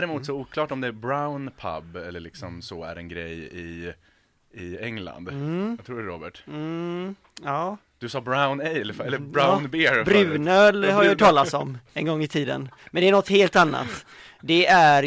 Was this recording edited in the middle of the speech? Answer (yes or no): no